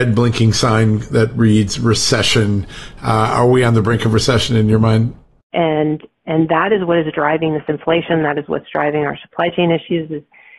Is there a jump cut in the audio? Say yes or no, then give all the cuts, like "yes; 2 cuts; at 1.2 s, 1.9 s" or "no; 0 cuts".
yes; 1 cut; at 5.5 s